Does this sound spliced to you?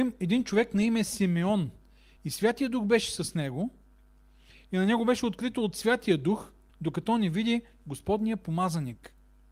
yes; 2 cuts; at 2.2 s, 6.7 s

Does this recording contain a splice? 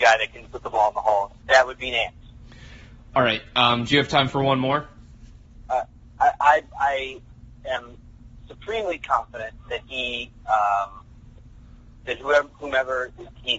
yes; 2 cuts; at 1.4 s, 5.7 s

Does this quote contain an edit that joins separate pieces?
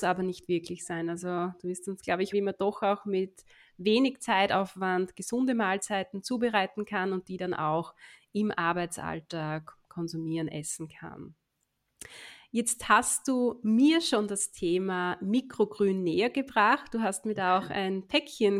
yes; 1 cut; at 2.3 s

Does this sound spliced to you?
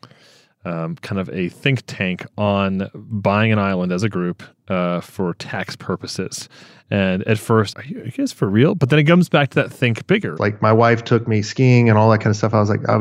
yes; 2 cuts; at 7.7 s, 10.4 s

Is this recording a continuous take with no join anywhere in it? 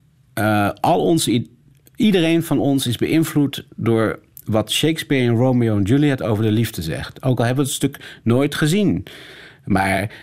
yes; 0 cuts

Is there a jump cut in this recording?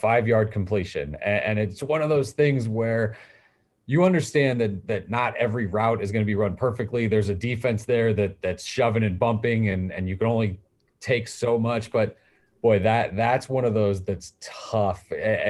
no; 0 cuts

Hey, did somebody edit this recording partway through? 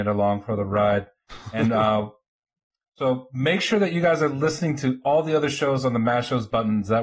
no; 0 cuts

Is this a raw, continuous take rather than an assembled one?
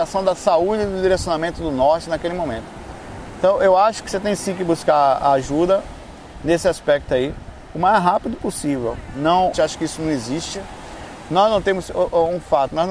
no; 1 cut; at 9.5 s

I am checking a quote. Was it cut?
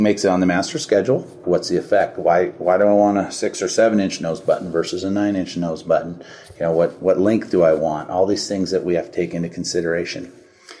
yes; 1 cut; at 1.4 s

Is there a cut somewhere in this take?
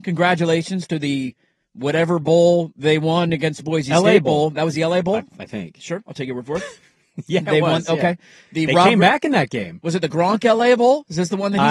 no; 0 cuts

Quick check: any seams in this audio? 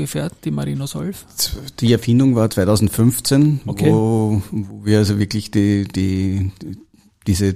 no; 0 cuts

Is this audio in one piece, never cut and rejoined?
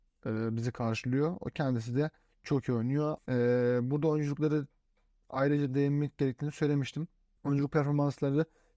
no; 1 cut; at 3.2 s

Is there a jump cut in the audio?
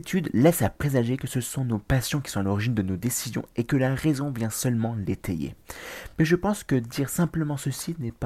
no; 0 cuts

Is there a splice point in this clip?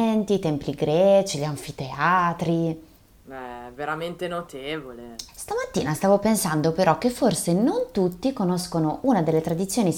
yes; 1 cut; at 5.3 s

